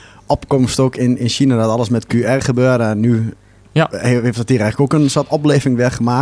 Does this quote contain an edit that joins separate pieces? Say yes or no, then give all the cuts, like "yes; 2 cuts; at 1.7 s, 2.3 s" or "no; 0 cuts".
no; 0 cuts